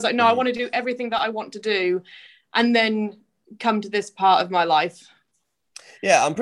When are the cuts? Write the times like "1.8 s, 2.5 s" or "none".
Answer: none